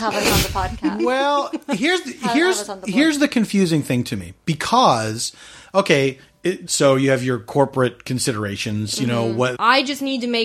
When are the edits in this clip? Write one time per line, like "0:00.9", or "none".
0:06.7
0:09.6